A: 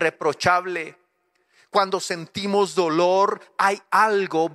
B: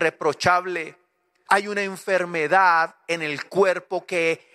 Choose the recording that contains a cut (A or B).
B